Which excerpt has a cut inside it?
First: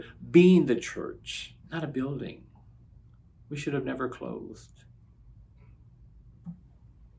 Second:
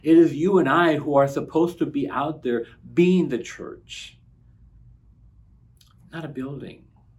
first; 1 cut; at 1.6 s

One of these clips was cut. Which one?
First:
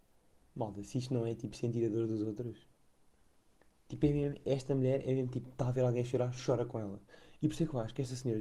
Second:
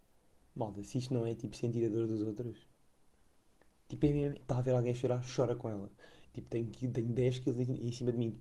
second; 2 cuts; at 4.4 s, 6.2 s

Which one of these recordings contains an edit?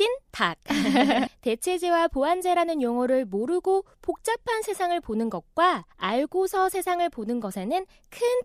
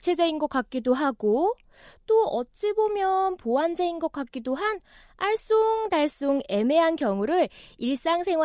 first; 2 cuts; at 1.3 s, 5.9 s

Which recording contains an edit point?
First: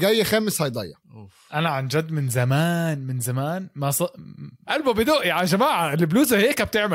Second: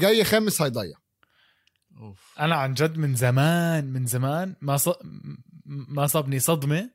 first; 2 cuts; at 1.0 s, 4.6 s

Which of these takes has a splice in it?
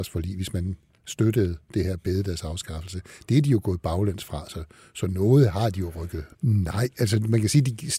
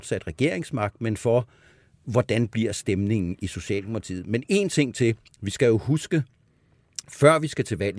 first; 1 cut; at 6.3 s

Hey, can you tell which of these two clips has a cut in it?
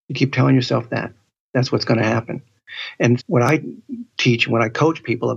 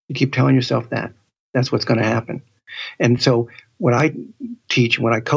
first; 1 cut; at 3.2 s

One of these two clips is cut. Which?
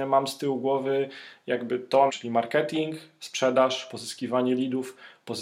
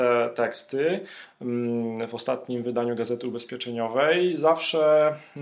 first; 1 cut; at 2.1 s

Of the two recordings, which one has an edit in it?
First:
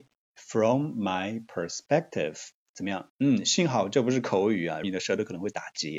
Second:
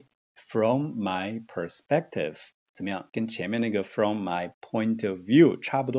first; 2 cuts; at 3.1 s, 4.8 s

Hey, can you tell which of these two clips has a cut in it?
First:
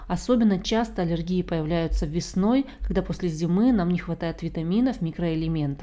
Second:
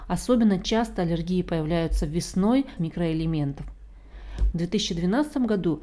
second; 2 cuts; at 2.8 s, 4.5 s

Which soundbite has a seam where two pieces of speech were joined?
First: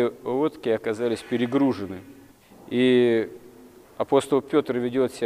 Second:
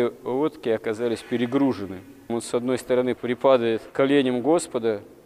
second; 1 cut; at 2.3 s

